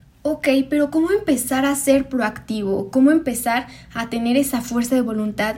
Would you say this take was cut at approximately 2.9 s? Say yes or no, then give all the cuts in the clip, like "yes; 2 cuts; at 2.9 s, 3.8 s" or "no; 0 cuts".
no; 0 cuts